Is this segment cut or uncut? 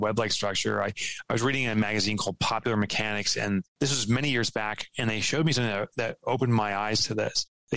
uncut